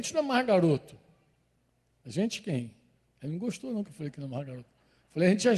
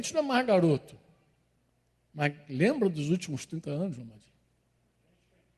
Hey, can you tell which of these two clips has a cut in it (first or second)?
first